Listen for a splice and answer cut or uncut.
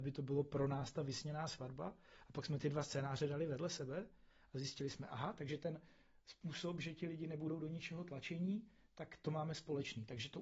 uncut